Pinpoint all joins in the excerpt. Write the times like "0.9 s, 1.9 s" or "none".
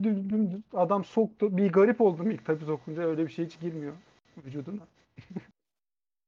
none